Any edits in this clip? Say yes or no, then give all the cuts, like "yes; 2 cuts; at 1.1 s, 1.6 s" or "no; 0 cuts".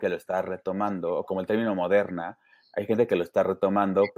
no; 0 cuts